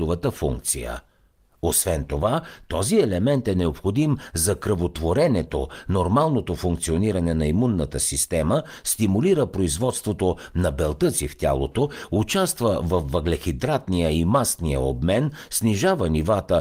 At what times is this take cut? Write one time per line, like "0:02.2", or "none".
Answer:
none